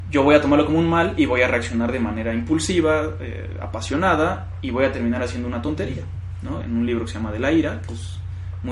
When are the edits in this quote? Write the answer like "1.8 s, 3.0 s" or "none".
6.6 s

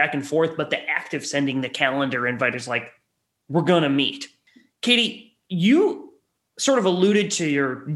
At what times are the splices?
none

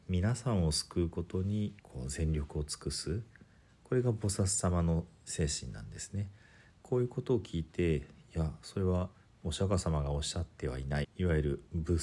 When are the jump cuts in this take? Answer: 1.8 s, 11.0 s

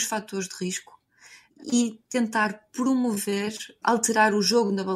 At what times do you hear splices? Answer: none

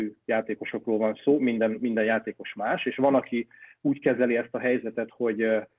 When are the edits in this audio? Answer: none

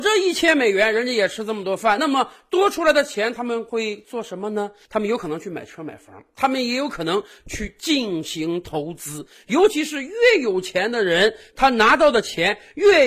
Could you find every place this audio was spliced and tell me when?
none

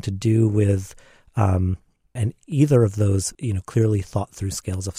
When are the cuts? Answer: 2.2 s, 3.3 s

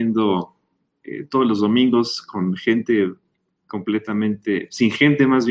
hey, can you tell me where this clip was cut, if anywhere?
none

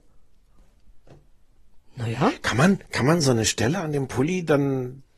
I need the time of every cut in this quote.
none

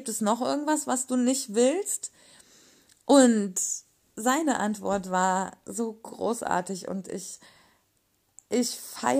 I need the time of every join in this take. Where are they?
none

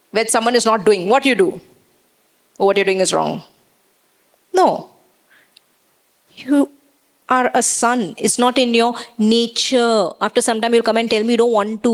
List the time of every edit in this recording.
none

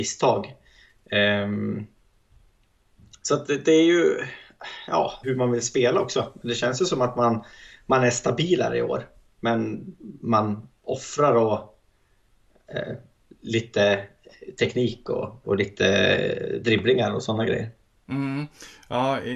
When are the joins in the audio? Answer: 5.2 s, 15.4 s

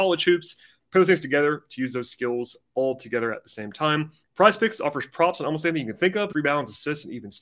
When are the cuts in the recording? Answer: 4.3 s, 6.3 s

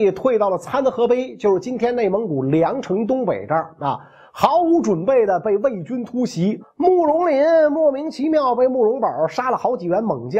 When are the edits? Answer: 6.6 s

